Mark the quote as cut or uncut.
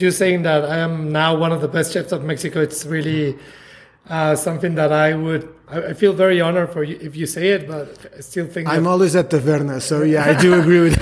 uncut